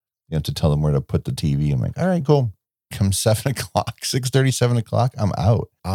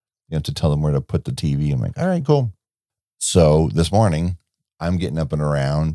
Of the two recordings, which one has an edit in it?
first; 1 cut; at 2.9 s

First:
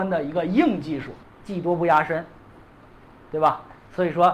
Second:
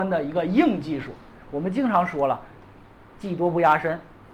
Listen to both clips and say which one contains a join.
first; 1 cut; at 1.2 s

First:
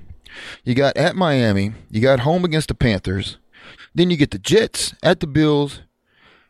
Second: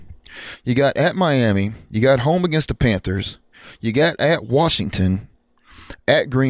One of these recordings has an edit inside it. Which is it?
first; 1 cut; at 3.8 s

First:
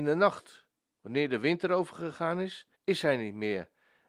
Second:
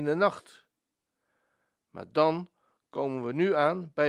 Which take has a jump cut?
first; 2 cuts; at 1.0 s, 2.7 s

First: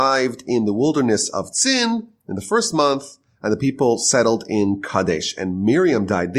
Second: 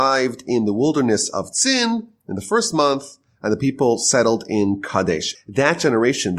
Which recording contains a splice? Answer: second; 1 cut; at 5.3 s

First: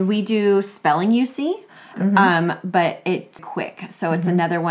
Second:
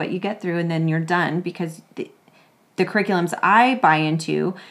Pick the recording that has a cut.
first; 2 cuts; at 1.9 s, 3.4 s

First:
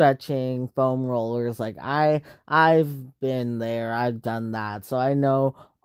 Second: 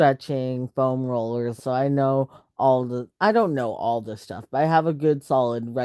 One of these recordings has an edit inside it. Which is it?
second; 1 cut; at 1.6 s

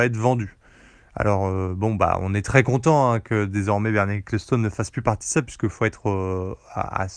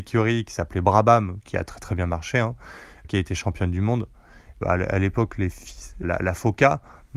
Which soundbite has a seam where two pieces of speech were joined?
second; 3 cuts; at 3.0 s, 4.6 s, 6.0 s

